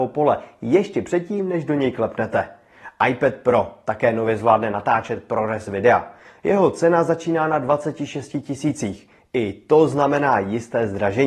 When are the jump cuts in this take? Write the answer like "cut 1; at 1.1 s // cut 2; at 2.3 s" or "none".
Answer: none